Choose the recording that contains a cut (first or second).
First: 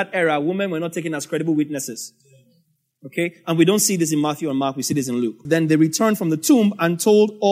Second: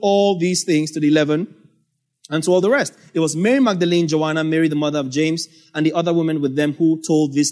first